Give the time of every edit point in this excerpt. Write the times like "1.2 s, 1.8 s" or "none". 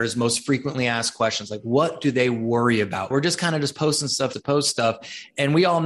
3.1 s, 4.3 s

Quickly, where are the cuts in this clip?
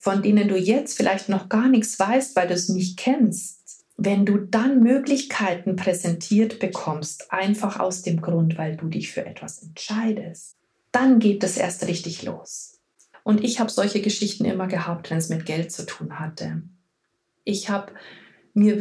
10.7 s, 13.1 s

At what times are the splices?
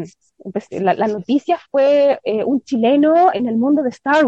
3.3 s

